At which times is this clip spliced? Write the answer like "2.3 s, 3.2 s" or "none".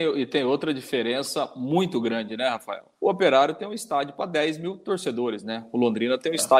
2.9 s

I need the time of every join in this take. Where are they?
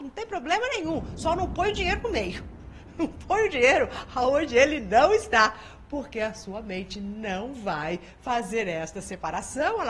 none

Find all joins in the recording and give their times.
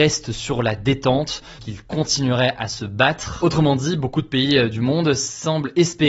1.6 s

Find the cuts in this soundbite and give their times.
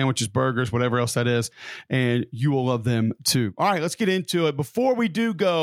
none

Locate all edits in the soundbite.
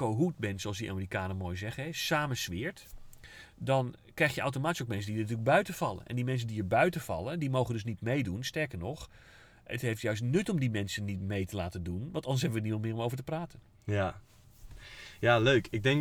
none

